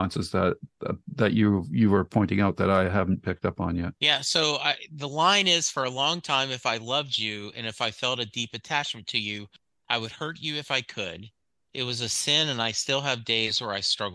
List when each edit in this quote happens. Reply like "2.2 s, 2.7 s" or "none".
4.0 s